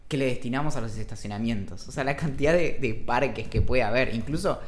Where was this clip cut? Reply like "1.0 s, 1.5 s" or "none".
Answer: none